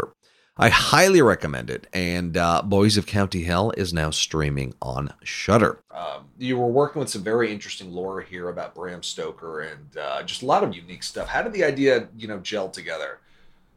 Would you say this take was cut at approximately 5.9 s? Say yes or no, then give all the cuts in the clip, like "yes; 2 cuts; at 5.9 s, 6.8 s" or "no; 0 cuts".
yes; 2 cuts; at 5.9 s, 10.7 s